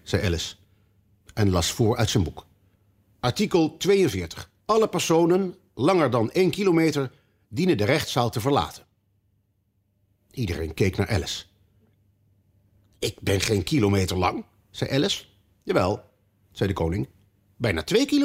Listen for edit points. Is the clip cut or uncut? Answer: cut